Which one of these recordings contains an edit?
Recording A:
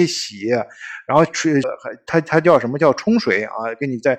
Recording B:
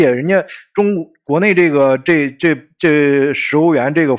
A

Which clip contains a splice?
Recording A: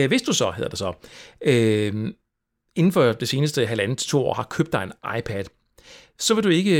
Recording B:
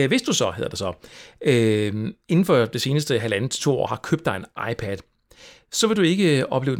B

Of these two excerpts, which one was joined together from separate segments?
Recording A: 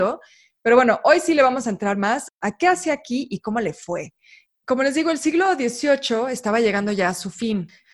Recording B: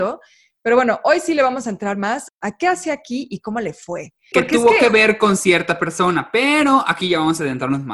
B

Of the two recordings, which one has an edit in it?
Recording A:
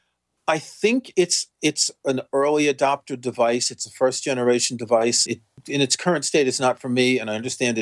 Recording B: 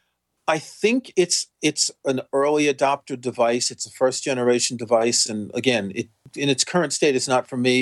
A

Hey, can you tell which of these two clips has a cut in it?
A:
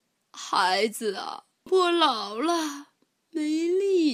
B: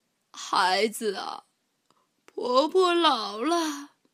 A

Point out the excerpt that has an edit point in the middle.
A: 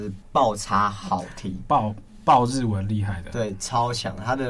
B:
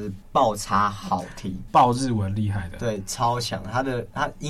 B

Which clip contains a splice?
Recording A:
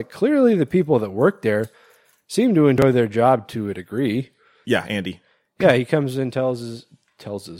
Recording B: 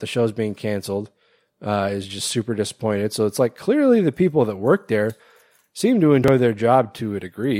A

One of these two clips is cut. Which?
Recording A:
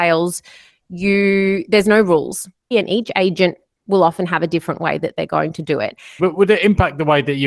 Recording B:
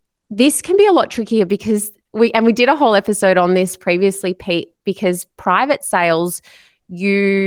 A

